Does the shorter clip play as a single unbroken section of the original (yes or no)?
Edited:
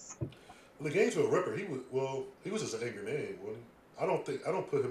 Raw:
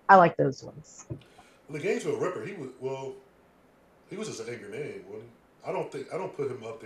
no